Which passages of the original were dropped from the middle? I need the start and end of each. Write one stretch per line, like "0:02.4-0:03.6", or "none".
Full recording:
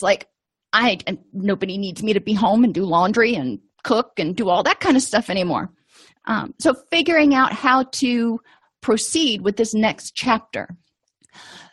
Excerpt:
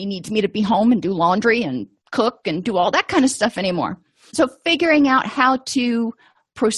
0:06.0-0:06.6